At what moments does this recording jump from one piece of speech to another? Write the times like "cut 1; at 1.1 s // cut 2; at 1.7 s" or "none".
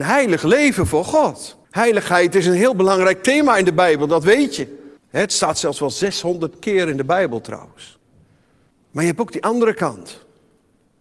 cut 1; at 1.6 s // cut 2; at 5.0 s // cut 3; at 8.7 s